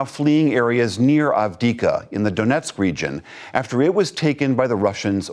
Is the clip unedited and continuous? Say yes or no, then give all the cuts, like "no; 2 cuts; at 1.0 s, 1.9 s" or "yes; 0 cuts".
yes; 0 cuts